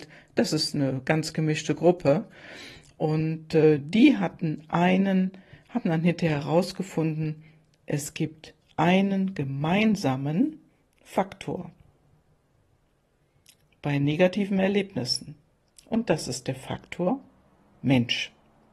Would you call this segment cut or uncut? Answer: uncut